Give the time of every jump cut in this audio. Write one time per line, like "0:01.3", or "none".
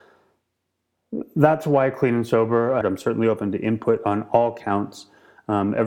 0:02.8